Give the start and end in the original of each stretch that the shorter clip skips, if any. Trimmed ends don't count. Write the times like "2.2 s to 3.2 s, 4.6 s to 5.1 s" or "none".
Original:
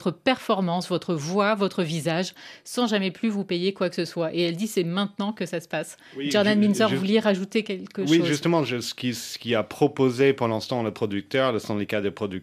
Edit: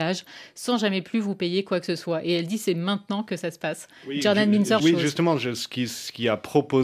6.9 s to 8.1 s